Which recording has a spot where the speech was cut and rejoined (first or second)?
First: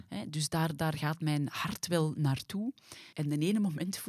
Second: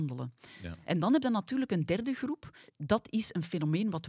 first